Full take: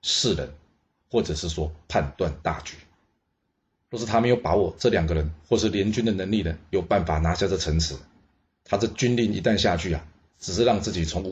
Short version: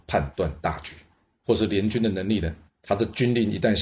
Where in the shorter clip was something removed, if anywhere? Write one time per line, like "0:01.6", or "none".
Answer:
0:01.4
0:02.7